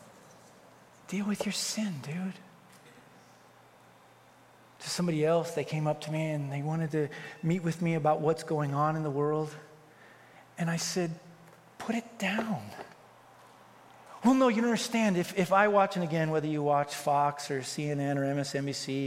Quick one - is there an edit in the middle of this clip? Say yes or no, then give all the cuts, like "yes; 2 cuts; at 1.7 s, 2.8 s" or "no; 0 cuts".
no; 0 cuts